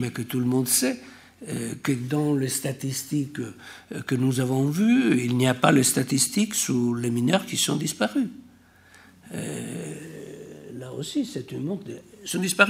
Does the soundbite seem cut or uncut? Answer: uncut